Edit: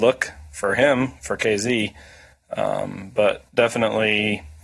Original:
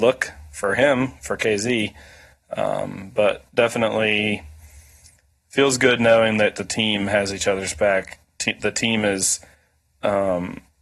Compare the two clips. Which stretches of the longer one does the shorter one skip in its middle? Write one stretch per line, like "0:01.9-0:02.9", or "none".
none